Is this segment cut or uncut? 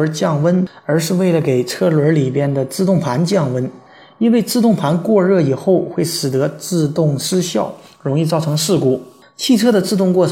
uncut